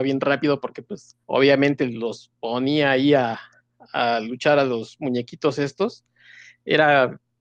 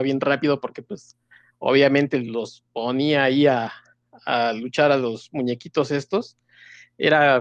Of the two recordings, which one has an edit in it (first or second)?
first